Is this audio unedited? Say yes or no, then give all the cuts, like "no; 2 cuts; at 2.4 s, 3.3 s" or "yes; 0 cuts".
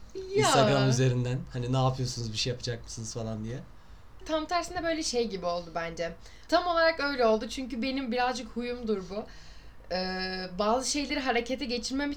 no; 2 cuts; at 4.2 s, 6.5 s